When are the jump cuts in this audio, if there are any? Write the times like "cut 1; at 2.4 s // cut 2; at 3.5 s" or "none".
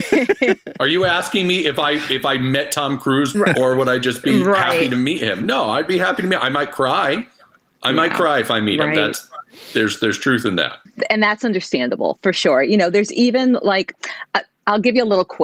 cut 1; at 3.3 s

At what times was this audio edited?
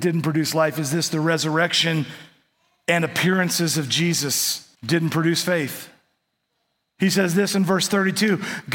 cut 1; at 4.8 s

